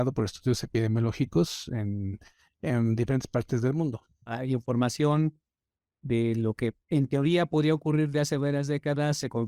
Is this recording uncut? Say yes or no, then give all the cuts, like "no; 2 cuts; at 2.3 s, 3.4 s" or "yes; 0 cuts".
no; 2 cuts; at 4.3 s, 6.8 s